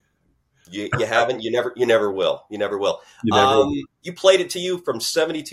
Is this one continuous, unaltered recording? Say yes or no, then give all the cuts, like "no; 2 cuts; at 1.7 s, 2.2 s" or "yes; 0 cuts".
yes; 0 cuts